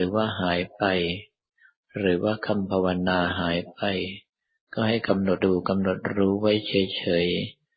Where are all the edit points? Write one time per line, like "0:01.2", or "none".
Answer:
0:05.4